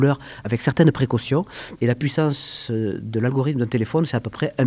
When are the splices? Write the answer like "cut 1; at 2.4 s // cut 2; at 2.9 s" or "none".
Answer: cut 1; at 1.8 s